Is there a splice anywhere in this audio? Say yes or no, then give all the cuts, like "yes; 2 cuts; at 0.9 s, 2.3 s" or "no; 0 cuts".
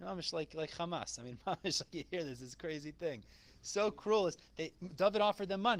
no; 0 cuts